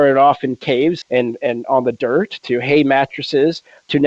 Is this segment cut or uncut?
cut